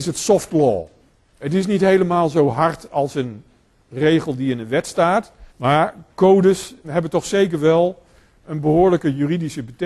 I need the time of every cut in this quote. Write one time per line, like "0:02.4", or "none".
0:05.5
0:06.8